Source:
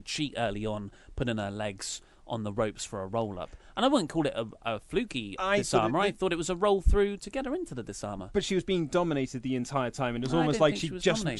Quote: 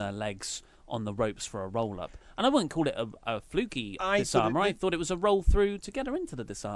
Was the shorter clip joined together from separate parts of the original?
no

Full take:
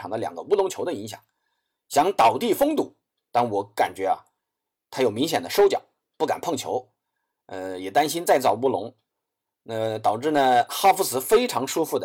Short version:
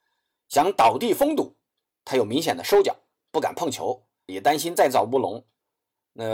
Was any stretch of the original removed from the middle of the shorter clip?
yes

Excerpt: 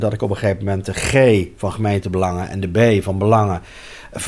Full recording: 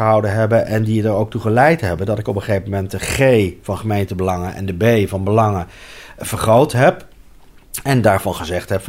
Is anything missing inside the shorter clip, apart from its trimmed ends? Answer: no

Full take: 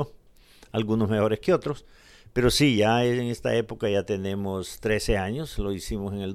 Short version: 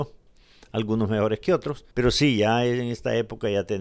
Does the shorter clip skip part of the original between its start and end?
yes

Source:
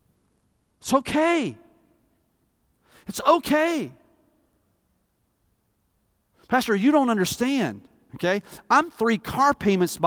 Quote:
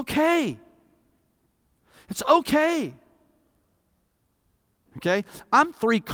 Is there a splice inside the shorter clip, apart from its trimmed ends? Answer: yes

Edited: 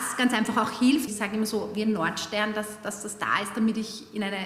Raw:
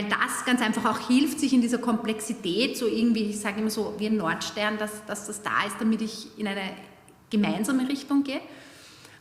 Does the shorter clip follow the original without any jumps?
no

